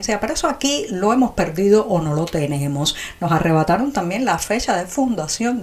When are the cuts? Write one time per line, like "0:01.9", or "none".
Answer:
none

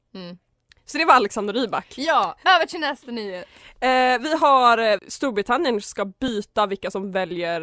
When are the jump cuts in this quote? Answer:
0:05.0

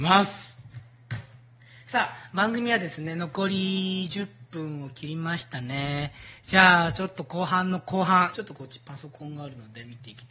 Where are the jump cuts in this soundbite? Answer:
0:08.3

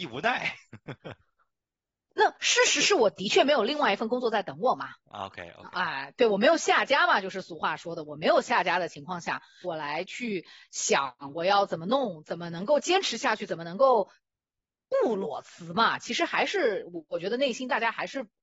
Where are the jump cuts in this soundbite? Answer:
0:09.6

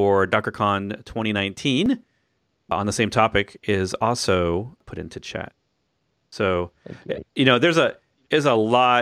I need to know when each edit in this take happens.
none

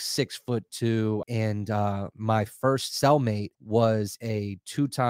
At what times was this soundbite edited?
0:01.2
0:03.5

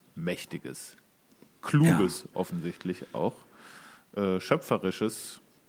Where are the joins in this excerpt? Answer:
none

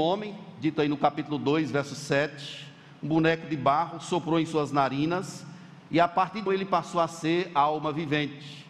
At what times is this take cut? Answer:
0:06.5

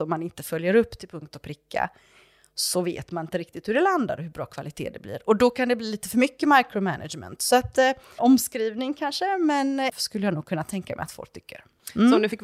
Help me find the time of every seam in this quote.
0:08.2
0:09.9

